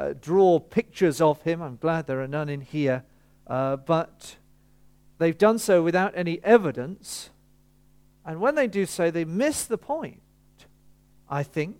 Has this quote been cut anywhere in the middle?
no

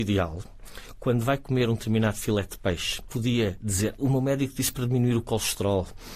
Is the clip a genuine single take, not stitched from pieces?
no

